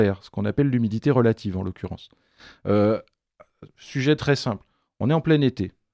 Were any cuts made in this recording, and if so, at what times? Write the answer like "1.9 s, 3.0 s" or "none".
none